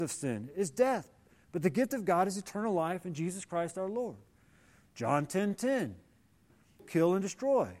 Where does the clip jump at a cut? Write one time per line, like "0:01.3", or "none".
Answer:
0:06.8